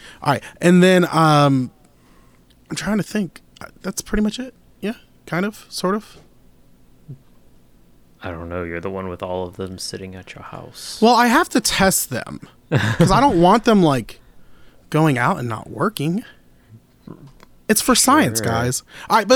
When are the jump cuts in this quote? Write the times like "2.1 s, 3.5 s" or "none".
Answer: 8.1 s